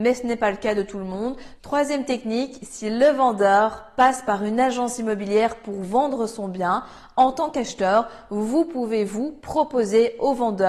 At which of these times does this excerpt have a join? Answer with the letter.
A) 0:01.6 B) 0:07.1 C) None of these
A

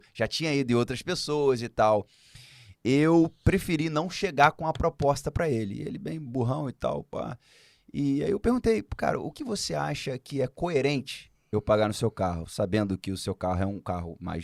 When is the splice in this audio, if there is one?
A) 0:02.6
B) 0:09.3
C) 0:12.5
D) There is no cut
B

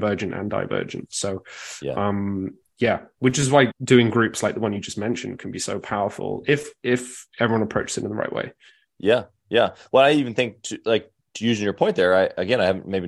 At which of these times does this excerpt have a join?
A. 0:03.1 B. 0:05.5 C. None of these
C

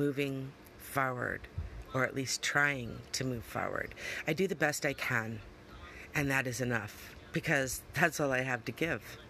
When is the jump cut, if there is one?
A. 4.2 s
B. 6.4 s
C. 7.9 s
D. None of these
D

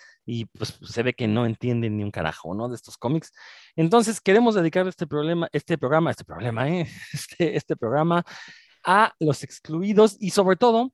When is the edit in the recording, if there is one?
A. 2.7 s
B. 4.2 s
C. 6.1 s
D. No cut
D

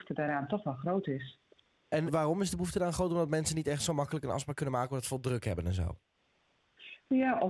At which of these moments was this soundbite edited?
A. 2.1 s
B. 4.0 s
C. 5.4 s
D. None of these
A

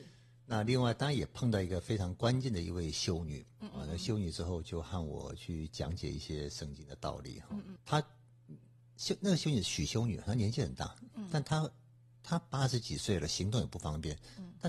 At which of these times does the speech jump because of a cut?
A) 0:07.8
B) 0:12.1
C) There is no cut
A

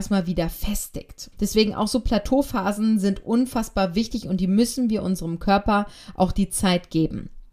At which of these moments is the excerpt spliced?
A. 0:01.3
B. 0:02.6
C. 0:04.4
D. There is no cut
A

